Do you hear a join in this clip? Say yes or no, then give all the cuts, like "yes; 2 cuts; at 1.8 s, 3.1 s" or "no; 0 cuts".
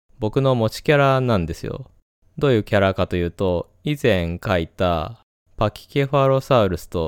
no; 0 cuts